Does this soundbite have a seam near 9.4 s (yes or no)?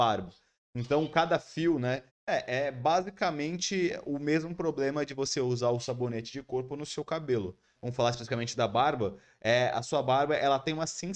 no